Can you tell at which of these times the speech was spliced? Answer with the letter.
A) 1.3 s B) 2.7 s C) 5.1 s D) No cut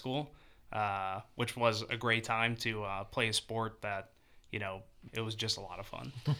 C